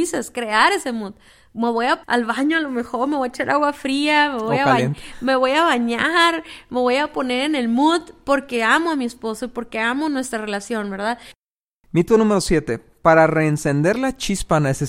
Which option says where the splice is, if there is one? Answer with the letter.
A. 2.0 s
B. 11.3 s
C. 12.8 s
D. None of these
A